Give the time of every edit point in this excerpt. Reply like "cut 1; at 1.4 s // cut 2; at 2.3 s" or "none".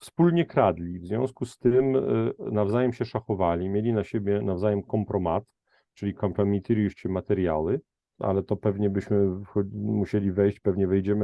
cut 1; at 8.2 s